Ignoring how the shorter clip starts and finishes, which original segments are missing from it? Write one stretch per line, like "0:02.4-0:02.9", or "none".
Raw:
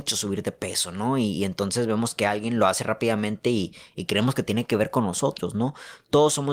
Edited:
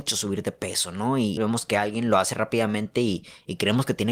0:01.4-0:01.9